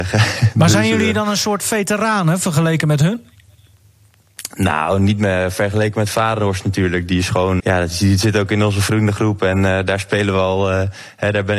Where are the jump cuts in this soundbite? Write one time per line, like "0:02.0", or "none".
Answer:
0:07.6